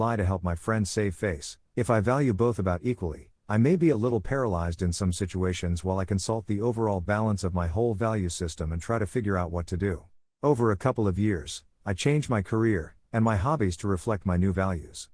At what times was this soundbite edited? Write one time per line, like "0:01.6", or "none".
0:10.2
0:13.0